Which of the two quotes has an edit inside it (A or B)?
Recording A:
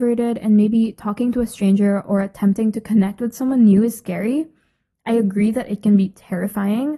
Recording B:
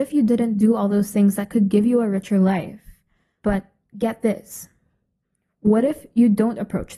B